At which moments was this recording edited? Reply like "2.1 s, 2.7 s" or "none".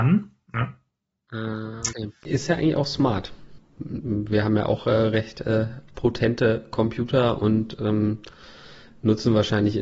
1.9 s